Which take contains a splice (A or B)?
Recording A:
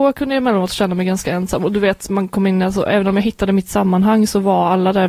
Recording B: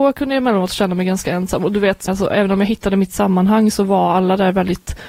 B